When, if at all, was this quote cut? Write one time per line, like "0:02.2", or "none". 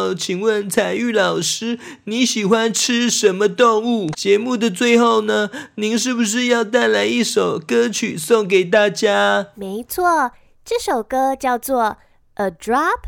0:04.1